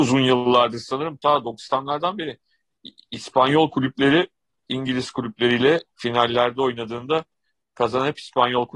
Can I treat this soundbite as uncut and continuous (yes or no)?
yes